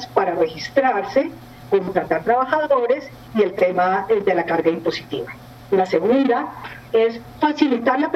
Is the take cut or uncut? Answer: uncut